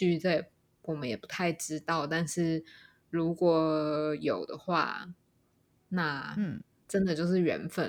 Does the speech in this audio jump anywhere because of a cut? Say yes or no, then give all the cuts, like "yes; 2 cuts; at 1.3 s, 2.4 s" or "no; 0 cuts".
no; 0 cuts